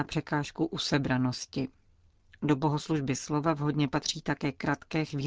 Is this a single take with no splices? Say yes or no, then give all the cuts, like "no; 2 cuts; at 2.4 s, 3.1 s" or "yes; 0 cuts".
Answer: yes; 0 cuts